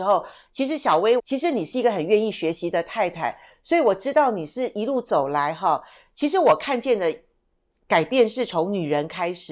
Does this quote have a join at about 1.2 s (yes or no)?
yes